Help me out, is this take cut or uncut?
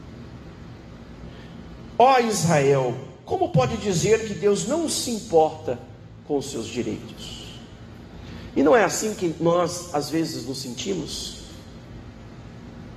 uncut